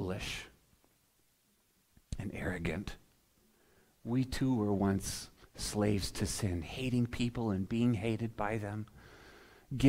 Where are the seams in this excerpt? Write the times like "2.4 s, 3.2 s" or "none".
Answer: none